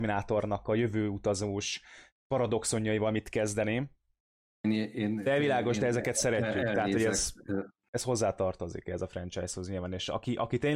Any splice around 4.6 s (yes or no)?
yes